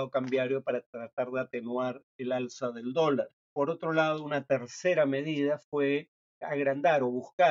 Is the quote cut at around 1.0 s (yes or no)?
no